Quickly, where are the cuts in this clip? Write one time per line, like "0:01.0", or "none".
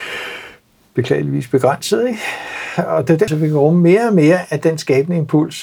0:03.3